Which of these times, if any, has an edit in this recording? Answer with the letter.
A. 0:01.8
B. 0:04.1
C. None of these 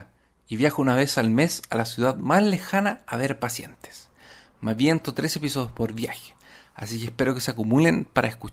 C